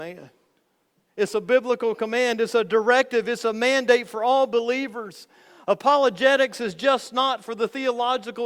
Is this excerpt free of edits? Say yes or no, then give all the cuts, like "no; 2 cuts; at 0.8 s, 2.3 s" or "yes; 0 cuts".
yes; 0 cuts